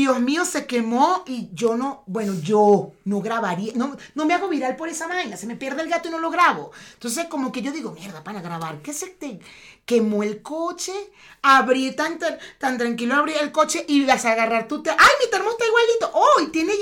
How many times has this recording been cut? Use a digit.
1